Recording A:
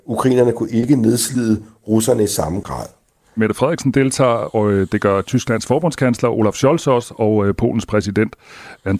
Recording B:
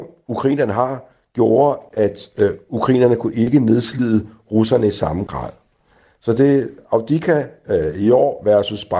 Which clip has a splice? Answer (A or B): A